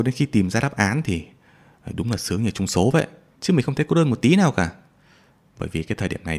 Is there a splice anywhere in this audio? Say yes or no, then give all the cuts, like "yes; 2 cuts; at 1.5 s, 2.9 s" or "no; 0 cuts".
yes; 1 cut; at 3.3 s